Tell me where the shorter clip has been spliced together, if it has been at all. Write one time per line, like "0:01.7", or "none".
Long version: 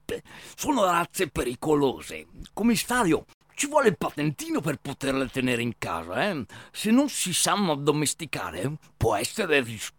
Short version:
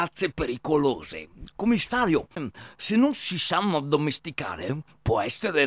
0:02.4